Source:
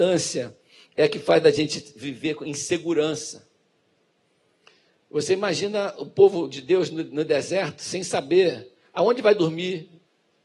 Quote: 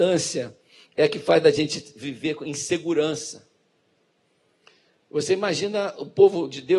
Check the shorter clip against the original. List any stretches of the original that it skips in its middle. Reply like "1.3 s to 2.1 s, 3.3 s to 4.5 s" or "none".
none